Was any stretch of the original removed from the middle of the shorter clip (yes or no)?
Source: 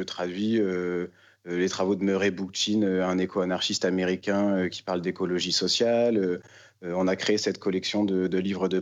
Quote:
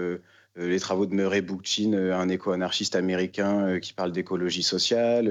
no